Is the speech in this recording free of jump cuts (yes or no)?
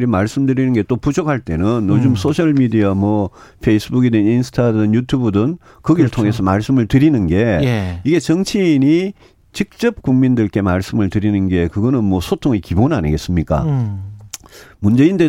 yes